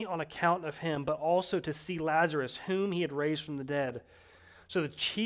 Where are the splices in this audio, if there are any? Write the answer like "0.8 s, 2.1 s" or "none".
none